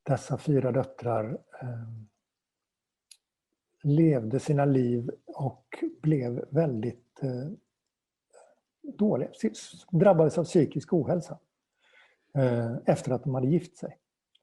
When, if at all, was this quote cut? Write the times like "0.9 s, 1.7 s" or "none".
none